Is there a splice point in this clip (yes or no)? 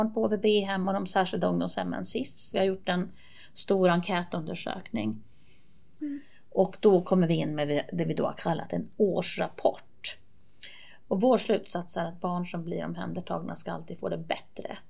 yes